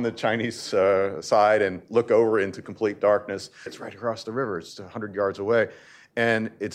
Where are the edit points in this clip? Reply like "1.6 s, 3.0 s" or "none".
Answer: 3.7 s